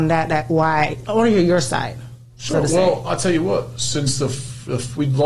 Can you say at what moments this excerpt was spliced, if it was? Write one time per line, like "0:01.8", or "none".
none